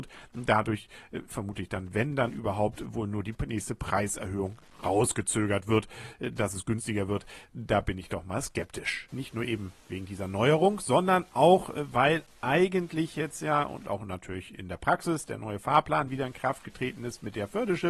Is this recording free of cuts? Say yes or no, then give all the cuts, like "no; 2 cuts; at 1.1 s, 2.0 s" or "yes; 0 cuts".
no; 1 cut; at 9.1 s